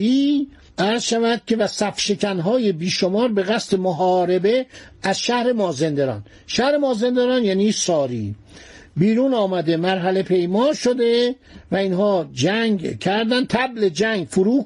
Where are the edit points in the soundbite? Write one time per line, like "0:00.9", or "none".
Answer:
none